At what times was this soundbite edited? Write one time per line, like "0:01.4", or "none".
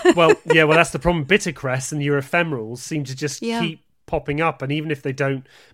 none